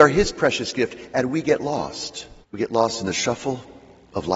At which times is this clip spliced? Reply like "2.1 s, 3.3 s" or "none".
2.4 s